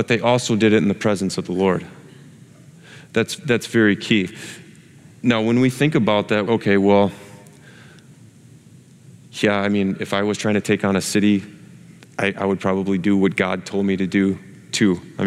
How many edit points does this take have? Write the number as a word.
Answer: one